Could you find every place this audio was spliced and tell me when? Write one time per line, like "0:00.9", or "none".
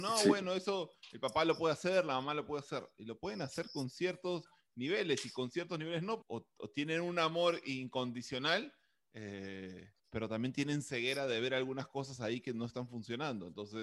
0:06.2
0:10.0